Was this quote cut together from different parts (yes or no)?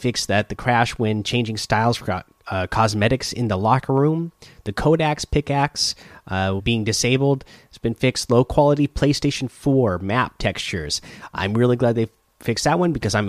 yes